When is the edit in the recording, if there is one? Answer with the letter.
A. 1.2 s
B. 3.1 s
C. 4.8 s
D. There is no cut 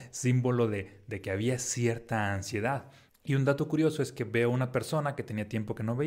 B